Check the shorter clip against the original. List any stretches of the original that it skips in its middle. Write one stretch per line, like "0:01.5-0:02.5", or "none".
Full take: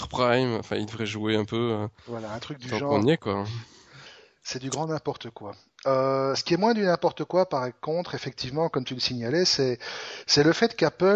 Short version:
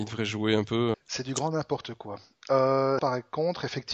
0:01.7-0:04.3
0:06.3-0:07.5

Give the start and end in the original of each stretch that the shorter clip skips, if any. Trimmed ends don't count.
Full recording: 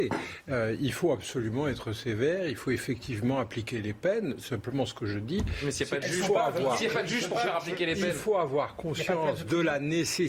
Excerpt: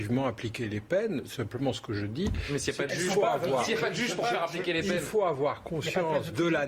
none

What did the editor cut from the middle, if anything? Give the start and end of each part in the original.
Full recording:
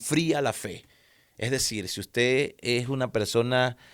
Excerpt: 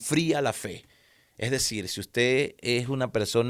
none

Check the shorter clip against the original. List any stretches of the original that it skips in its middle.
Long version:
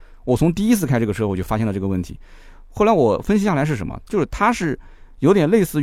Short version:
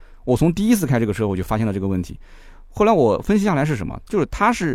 none

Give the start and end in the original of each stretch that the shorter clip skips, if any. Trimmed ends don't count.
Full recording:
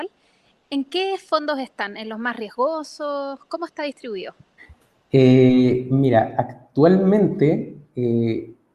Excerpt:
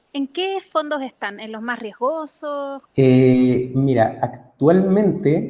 0:03.4-0:05.0

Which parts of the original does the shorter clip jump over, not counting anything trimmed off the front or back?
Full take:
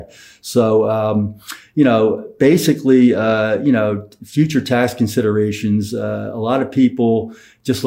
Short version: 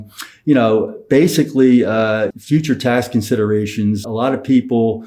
0:03.6-0:04.2
0:05.9-0:06.3

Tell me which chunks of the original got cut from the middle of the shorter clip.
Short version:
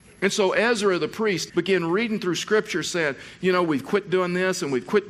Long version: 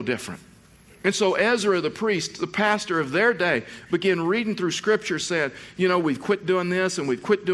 0:02.3-0:03.9

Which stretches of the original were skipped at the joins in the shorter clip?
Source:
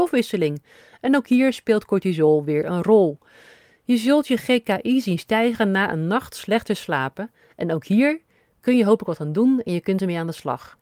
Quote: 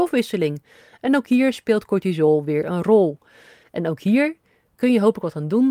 0:03.6-0:07.5

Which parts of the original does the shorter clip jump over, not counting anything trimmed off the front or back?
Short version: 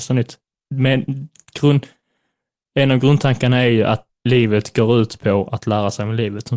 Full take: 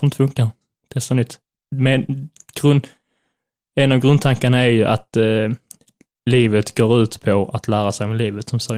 0:05.1-0:06.1

